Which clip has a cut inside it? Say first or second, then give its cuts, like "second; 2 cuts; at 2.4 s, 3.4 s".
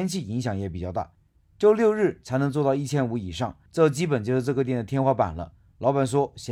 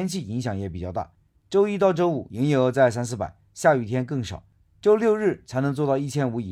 first; 2 cuts; at 1.4 s, 3.7 s